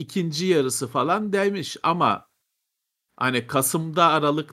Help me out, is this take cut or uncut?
uncut